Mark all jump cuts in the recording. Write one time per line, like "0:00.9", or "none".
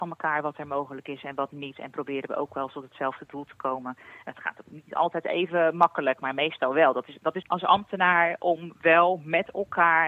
0:07.4